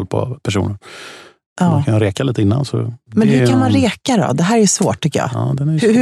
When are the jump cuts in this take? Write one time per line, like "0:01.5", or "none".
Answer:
0:01.4